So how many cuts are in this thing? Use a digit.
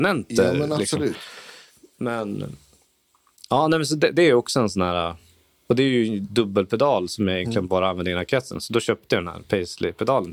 0